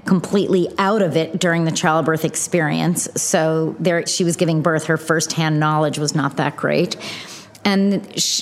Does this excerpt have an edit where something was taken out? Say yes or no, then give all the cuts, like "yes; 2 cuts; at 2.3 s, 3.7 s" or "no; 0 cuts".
yes; 1 cut; at 4.1 s